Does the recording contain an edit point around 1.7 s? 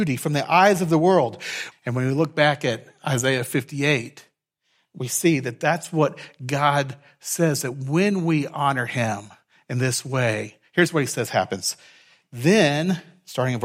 yes; 1 cut; at 1.7 s

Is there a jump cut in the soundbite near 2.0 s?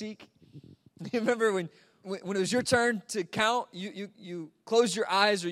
yes; 1 cut; at 2.0 s

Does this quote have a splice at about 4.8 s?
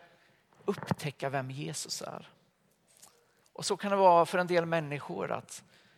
no; 1 cut; at 3.4 s

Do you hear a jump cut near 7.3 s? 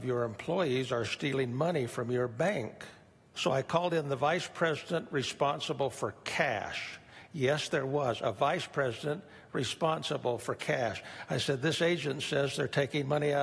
no; 1 cut; at 3.3 s

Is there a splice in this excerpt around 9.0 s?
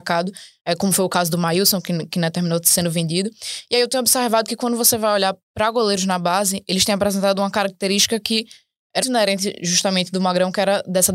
yes; 1 cut; at 9.0 s

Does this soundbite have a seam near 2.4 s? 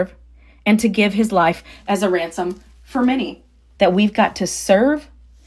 no; 1 cut; at 3.7 s

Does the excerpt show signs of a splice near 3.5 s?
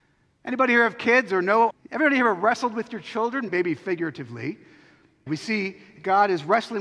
yes; 3 cuts; at 1.7 s, 3.5 s, 5.3 s

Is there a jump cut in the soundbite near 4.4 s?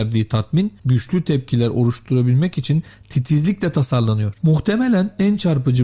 yes; 1 cut; at 4.4 s

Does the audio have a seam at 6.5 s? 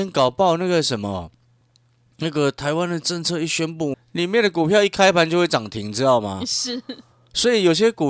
no; 1 cut; at 3.9 s

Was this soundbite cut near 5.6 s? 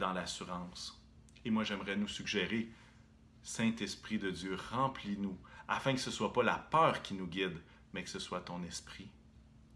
no; 0 cuts

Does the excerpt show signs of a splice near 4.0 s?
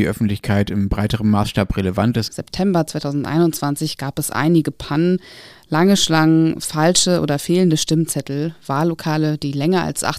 no; 1 cut; at 2.3 s

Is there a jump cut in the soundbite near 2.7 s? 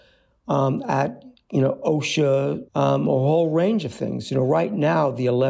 yes; 1 cut; at 2.7 s

